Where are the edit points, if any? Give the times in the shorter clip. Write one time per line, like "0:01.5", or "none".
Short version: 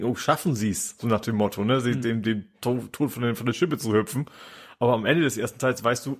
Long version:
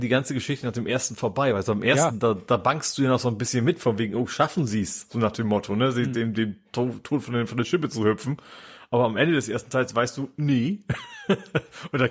none